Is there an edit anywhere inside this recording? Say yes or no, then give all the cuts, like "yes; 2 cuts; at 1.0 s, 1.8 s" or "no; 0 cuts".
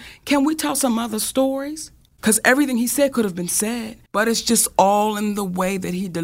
yes; 2 cuts; at 2.2 s, 4.0 s